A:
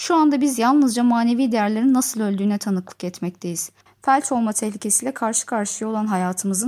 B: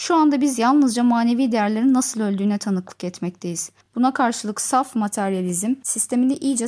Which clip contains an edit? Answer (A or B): A